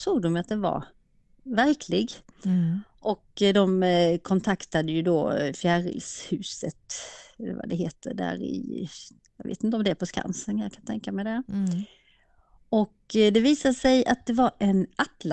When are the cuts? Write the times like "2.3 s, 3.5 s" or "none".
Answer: none